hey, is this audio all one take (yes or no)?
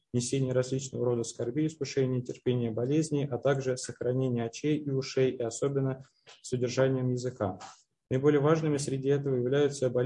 yes